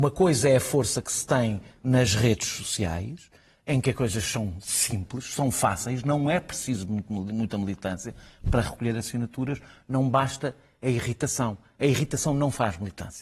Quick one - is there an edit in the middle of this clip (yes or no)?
no